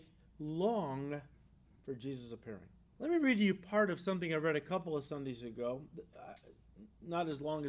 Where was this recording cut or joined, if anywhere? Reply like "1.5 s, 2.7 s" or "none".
3.0 s